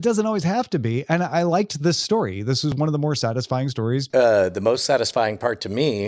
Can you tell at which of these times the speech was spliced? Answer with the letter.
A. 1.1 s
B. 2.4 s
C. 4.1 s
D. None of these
C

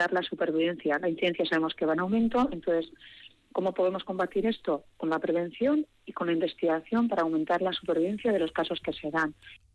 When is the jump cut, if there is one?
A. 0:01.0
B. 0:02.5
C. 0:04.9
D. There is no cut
D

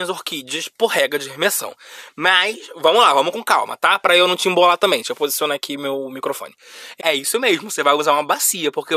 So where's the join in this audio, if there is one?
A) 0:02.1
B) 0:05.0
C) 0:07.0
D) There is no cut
C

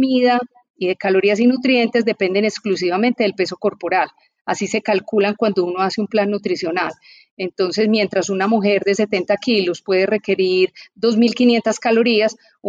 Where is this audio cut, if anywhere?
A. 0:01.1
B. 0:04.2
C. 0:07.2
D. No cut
D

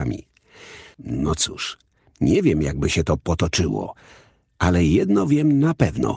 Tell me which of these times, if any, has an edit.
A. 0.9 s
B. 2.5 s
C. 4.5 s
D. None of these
A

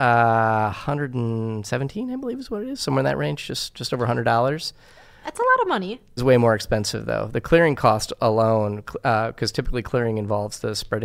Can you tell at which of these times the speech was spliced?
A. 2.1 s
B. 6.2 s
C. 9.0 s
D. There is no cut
B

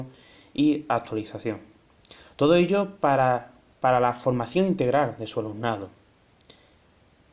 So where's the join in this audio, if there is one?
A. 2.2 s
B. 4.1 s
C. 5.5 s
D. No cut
D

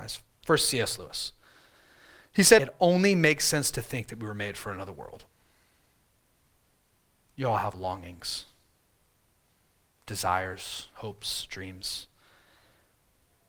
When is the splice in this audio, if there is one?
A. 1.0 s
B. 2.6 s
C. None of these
B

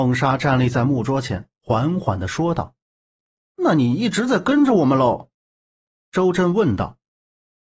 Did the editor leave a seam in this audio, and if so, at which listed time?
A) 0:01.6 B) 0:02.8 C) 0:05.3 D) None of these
B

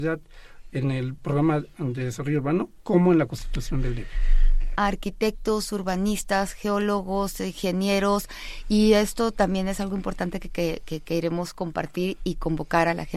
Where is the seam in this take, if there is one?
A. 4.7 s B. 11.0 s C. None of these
A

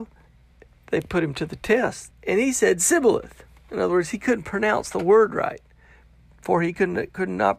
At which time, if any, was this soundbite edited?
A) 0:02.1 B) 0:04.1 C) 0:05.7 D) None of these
A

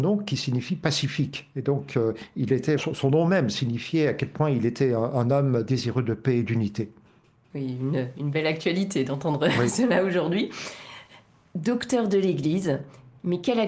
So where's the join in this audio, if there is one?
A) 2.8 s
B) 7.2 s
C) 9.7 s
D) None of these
A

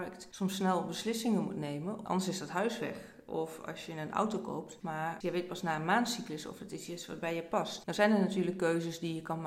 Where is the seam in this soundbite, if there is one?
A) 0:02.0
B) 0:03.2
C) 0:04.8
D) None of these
C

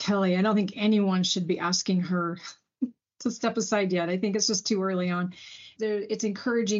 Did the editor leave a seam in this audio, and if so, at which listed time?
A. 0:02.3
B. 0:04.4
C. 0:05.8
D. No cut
C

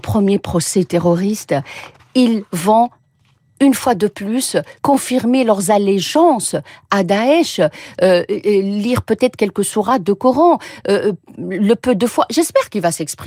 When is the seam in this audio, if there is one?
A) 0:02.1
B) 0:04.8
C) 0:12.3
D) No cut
B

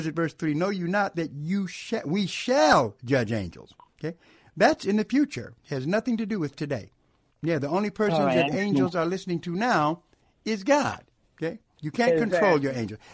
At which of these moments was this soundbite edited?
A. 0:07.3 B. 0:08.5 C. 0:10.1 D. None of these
A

